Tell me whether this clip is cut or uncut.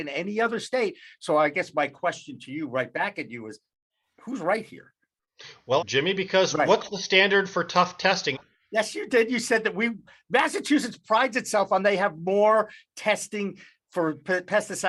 cut